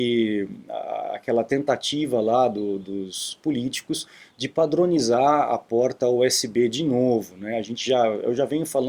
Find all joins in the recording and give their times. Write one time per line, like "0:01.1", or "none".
none